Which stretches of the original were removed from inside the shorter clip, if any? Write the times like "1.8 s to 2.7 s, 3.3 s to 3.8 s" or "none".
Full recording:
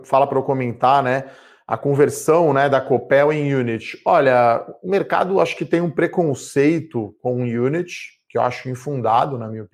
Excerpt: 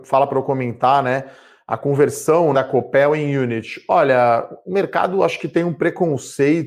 2.5 s to 2.7 s